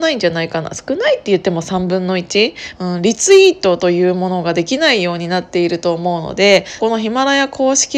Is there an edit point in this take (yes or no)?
yes